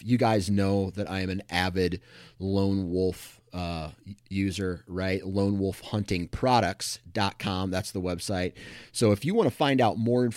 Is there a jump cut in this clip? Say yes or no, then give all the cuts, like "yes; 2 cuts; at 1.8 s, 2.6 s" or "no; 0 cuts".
no; 0 cuts